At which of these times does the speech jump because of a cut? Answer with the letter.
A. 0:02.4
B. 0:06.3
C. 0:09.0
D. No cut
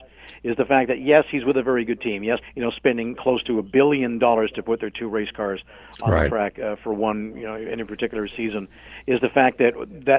A